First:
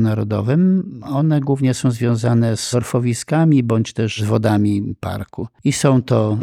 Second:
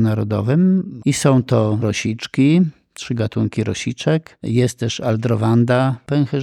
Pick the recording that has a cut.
second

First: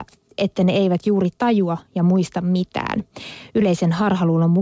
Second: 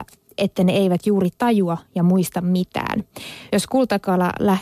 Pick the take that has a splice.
second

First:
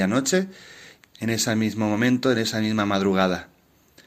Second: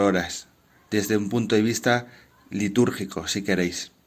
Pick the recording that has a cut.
first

